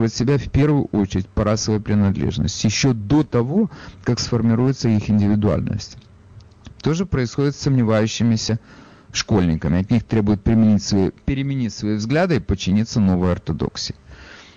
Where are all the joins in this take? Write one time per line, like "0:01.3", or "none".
0:06.7